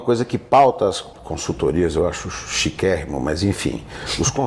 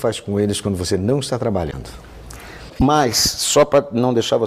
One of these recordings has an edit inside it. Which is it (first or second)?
second